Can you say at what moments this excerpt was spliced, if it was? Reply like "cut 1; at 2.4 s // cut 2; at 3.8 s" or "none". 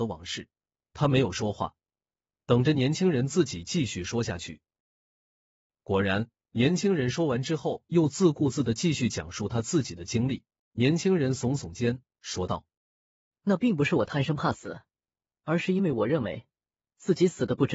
cut 1; at 10.7 s // cut 2; at 12.8 s